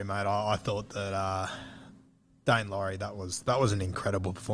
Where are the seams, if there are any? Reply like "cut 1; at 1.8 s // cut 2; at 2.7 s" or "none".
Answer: none